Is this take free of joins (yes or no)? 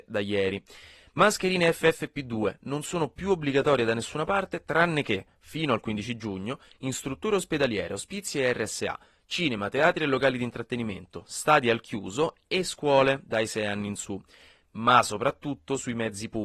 yes